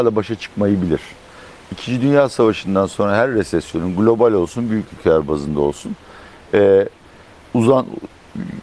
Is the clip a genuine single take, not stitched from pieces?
yes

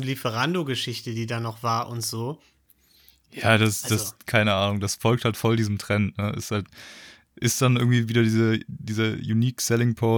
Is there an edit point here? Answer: no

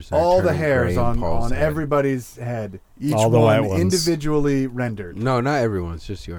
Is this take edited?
no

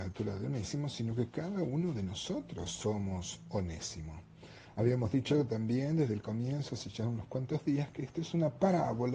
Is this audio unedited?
yes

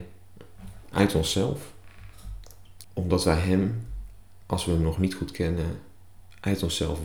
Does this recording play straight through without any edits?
no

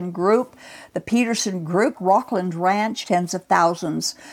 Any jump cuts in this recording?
yes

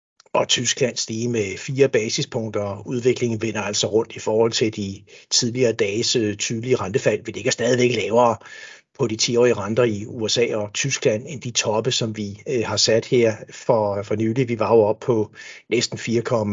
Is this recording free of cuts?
yes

